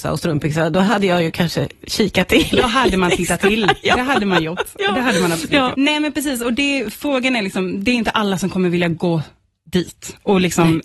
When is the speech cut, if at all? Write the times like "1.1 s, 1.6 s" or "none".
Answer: 5.7 s